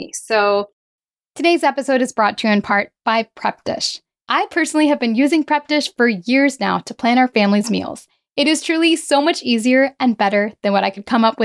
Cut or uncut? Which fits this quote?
cut